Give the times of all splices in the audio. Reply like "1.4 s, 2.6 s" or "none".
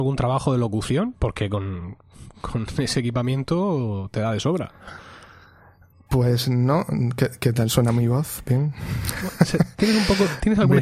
none